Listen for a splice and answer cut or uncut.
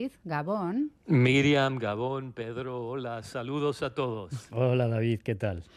cut